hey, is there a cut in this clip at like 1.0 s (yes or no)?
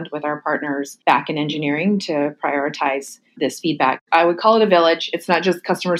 yes